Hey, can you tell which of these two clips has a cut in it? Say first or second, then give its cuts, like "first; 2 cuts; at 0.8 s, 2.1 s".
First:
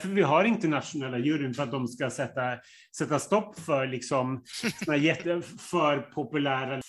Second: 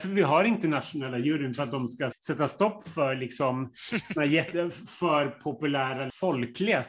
second; 1 cut; at 2.1 s